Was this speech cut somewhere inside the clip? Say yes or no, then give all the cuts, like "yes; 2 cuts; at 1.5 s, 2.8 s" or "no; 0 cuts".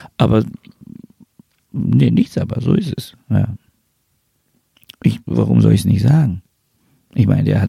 no; 0 cuts